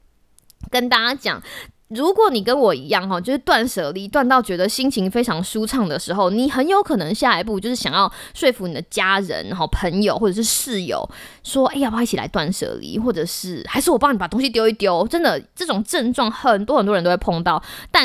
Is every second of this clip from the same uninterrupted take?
yes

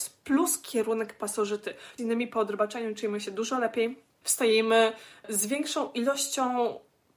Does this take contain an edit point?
yes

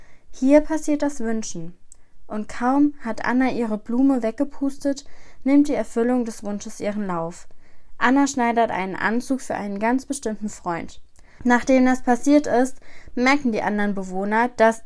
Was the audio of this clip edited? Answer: no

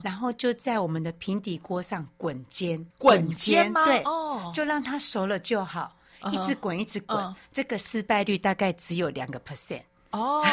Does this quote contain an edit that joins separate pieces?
yes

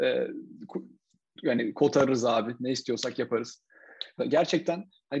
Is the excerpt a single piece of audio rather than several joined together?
no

